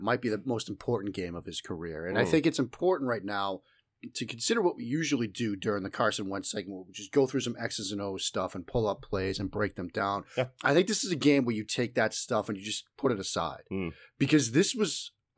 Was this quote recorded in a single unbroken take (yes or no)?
yes